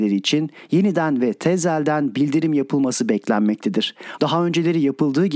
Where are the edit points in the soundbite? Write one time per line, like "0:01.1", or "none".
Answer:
0:04.2